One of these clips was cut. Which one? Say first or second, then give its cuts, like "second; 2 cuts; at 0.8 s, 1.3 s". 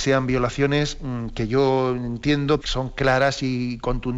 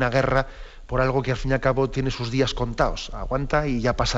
first; 1 cut; at 2.6 s